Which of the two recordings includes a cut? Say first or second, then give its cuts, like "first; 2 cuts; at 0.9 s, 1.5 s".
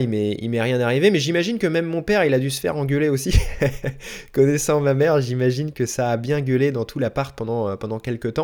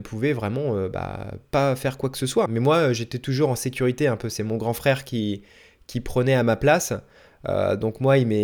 second; 1 cut; at 2.5 s